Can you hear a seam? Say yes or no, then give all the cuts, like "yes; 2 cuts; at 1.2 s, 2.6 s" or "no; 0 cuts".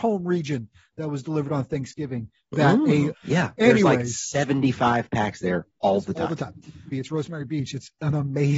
yes; 2 cuts; at 3.1 s, 6.9 s